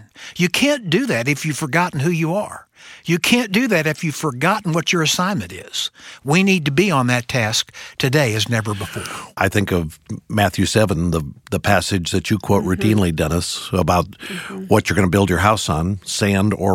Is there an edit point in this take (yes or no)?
no